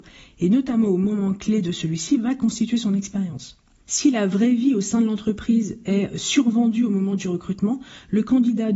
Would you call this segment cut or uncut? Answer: cut